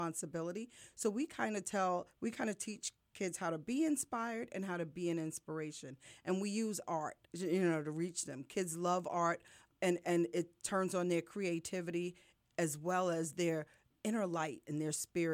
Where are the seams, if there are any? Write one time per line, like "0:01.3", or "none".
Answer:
0:07.2